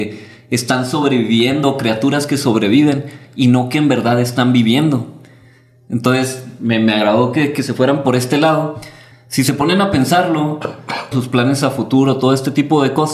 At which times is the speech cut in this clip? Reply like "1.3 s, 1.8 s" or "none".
9.1 s, 11.1 s